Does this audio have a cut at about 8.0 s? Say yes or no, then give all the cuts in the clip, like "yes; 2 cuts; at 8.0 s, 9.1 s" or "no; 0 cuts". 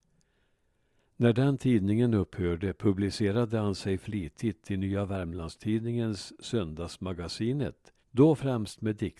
yes; 1 cut; at 8.0 s